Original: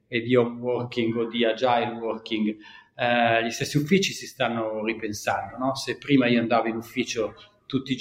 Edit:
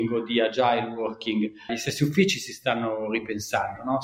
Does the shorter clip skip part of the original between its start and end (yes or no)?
yes